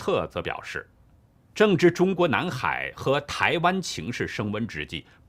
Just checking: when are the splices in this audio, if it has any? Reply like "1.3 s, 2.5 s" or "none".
none